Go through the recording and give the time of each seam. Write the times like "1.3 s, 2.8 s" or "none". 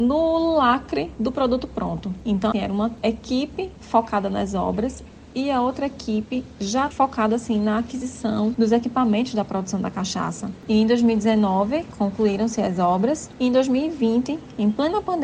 2.5 s